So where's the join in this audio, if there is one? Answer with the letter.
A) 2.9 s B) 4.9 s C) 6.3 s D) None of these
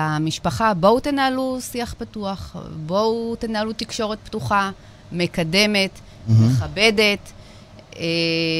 D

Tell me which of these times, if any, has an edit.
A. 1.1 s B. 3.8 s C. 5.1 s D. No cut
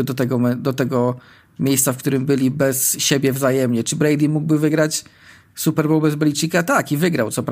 D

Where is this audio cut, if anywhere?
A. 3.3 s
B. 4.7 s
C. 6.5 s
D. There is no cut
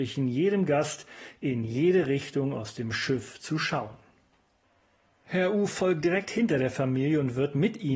D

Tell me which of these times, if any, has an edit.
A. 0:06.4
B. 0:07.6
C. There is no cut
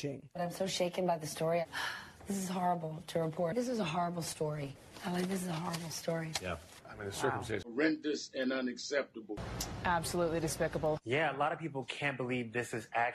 B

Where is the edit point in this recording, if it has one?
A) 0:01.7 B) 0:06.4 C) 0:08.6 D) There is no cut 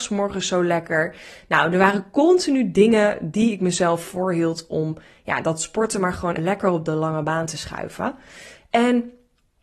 B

